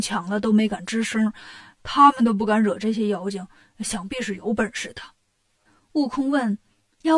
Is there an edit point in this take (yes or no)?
no